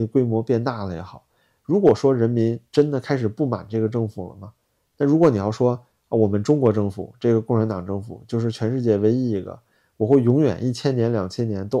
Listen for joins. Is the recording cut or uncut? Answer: uncut